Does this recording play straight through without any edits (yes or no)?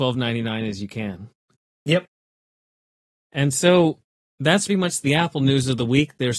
no